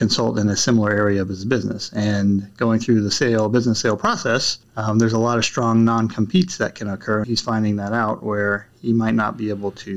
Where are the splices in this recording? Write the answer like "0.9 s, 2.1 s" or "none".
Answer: 7.2 s